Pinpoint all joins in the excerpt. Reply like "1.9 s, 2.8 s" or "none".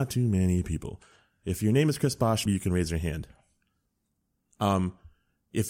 2.5 s